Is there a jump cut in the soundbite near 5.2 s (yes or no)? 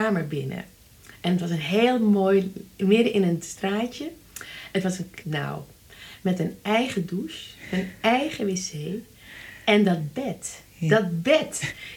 yes